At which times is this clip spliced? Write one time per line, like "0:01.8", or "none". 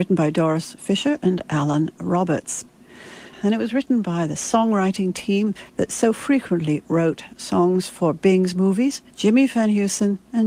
0:03.3
0:05.7
0:09.1